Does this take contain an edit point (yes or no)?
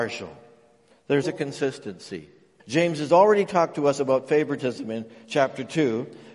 yes